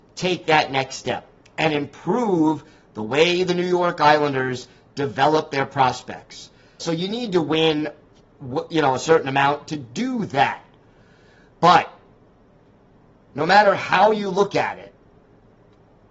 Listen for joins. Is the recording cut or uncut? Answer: cut